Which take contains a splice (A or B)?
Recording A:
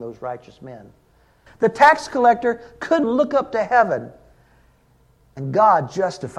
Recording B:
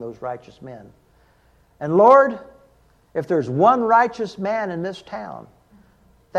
A